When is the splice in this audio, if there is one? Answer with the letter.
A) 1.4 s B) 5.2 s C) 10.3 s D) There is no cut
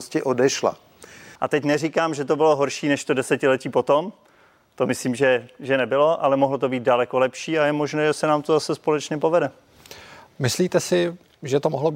A